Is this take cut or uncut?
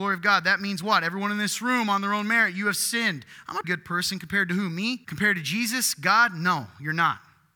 cut